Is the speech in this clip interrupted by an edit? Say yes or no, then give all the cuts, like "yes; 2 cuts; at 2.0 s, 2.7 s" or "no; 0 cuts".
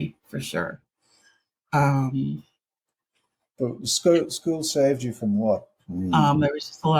yes; 1 cut; at 5.8 s